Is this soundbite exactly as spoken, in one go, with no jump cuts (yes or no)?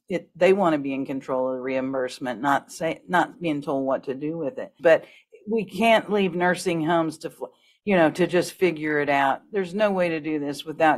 no